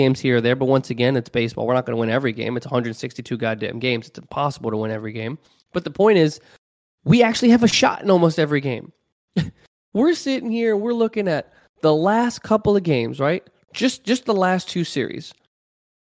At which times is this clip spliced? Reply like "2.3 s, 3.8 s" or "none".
none